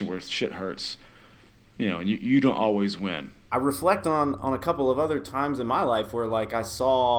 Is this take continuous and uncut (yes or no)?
no